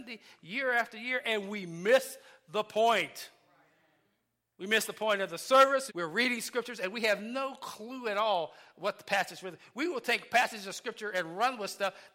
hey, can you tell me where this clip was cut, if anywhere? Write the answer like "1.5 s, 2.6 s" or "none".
5.9 s